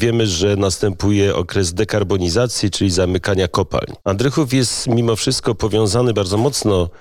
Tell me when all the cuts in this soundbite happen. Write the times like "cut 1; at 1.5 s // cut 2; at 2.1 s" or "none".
cut 1; at 4.0 s